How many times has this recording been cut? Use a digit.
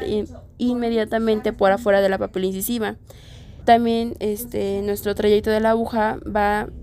1